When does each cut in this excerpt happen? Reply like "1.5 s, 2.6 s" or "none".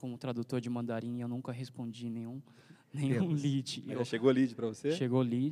none